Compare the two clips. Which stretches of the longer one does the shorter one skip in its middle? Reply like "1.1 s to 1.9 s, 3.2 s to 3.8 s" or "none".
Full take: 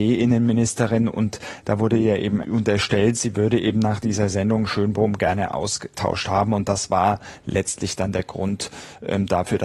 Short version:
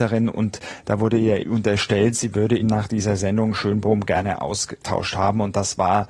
2.2 s to 2.4 s, 3.6 s to 3.7 s